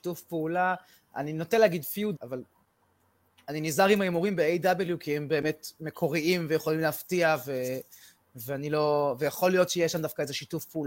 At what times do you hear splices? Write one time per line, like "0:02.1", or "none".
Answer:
0:02.1